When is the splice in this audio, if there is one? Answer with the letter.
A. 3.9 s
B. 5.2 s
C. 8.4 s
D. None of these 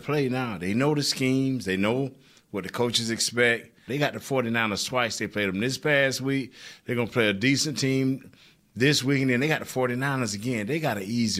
A